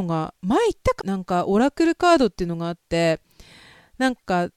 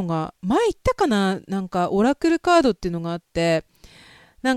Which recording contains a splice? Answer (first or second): first